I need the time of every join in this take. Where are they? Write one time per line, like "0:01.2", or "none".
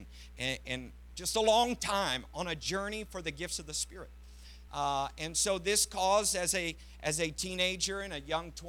0:01.1
0:04.7